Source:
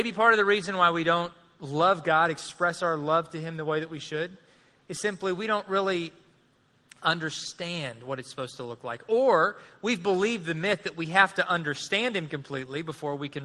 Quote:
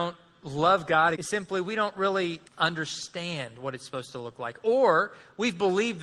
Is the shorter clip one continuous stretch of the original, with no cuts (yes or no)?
no